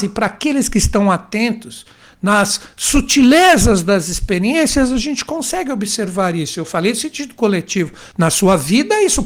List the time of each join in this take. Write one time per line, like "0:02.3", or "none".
none